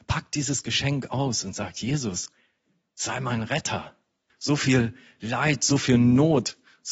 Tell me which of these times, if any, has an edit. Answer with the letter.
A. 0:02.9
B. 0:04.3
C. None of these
B